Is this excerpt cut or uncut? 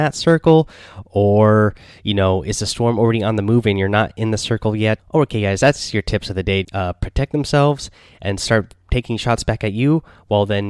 cut